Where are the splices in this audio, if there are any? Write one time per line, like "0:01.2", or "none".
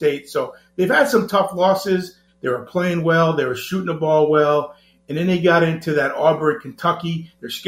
0:02.3